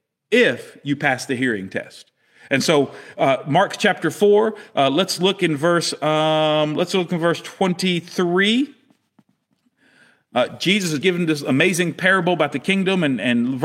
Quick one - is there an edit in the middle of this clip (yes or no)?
yes